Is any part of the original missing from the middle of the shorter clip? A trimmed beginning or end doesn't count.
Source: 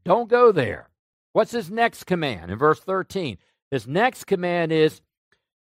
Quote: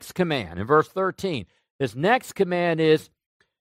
no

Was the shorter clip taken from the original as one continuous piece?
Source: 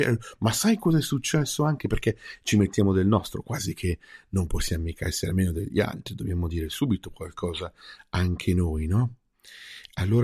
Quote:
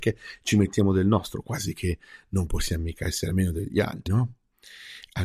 no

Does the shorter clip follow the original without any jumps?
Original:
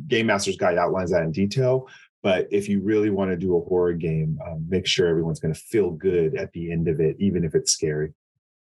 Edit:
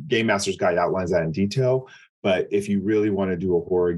yes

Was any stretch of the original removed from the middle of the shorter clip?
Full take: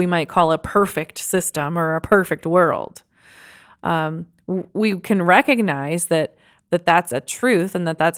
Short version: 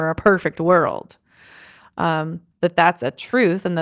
yes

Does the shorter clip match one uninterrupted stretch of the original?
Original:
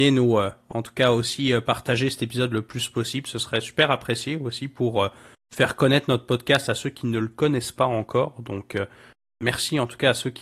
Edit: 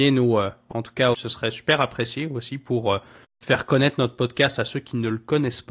no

